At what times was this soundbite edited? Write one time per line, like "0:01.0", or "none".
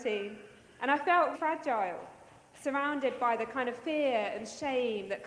0:01.3